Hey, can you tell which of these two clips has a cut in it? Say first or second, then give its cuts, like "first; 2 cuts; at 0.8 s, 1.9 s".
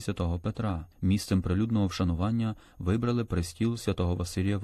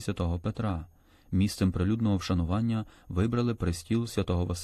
first; 1 cut; at 0.9 s